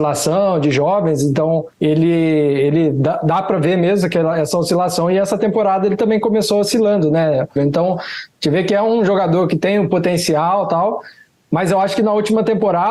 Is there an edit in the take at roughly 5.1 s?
no; 2 cuts; at 1.7 s, 7.6 s

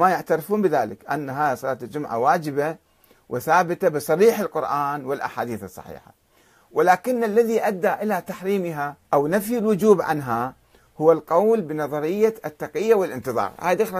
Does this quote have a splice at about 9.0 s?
yes; 1 cut; at 9.0 s

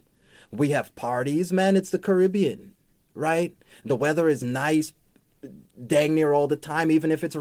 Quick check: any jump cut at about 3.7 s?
no; 0 cuts

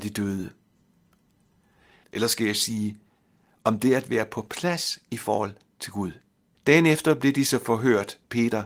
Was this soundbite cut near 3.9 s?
no; 2 cuts; at 2.0 s, 6.6 s

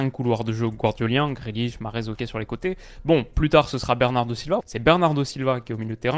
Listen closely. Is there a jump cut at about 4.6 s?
yes; 1 cut; at 4.6 s

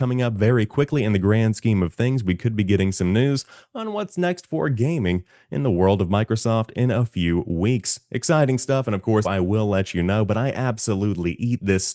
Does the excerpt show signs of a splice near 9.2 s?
yes; 1 cut; at 9.2 s

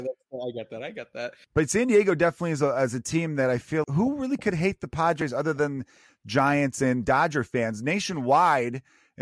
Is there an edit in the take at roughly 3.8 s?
yes; 2 cuts; at 1.4 s, 3.8 s

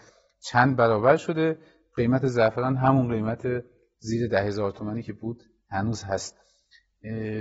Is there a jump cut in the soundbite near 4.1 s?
no; 0 cuts

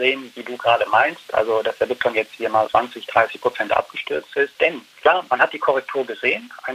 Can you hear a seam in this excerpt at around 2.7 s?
yes; 2 cuts; at 2.7 s, 4.5 s

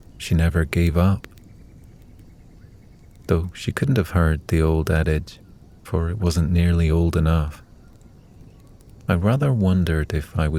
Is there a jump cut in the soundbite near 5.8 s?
yes; 1 cut; at 5.8 s

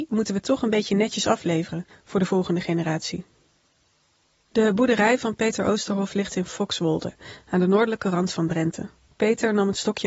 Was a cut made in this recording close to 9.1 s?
yes; 1 cut; at 9.1 s

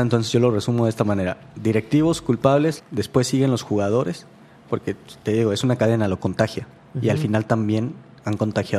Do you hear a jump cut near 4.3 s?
no; 1 cut; at 2.8 s

